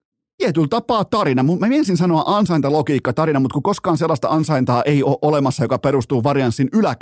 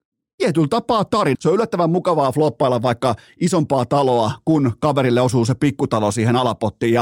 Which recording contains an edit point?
second; 1 cut; at 1.3 s

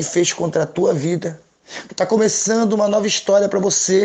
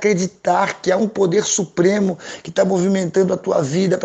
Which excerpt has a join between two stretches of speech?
first; 1 cut; at 1.9 s

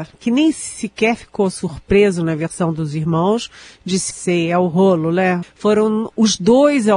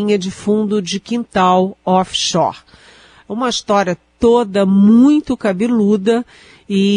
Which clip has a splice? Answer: first; 2 cuts; at 4.1 s, 5.4 s

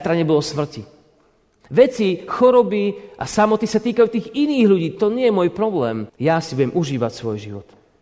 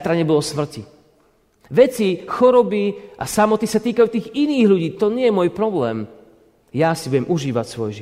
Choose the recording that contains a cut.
first; 1 cut; at 6.1 s

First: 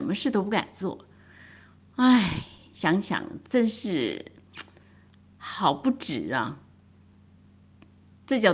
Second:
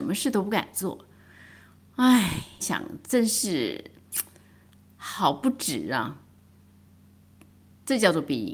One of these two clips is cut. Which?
second; 1 cut; at 2.6 s

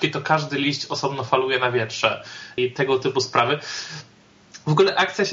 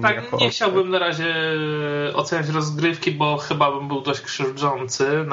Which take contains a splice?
first; 1 cut; at 2.6 s

